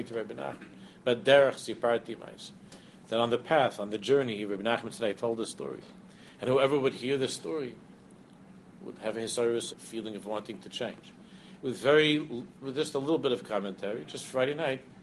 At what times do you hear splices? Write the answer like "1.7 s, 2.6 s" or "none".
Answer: 9.7 s, 11.6 s